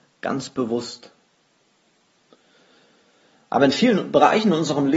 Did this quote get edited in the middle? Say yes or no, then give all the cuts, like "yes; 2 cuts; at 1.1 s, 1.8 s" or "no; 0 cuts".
no; 0 cuts